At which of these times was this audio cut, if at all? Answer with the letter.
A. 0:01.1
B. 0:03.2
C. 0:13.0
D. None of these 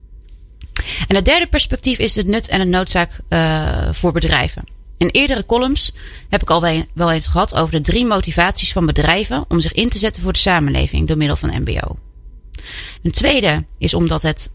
C